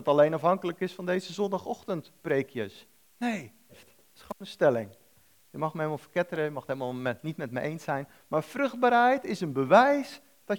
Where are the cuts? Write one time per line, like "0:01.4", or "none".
0:03.7